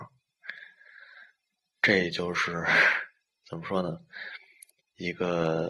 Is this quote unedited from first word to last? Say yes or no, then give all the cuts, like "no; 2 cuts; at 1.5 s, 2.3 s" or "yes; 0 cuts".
yes; 0 cuts